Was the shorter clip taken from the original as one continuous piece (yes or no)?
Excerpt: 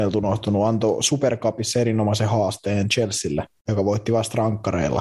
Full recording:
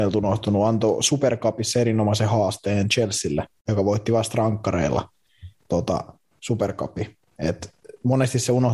yes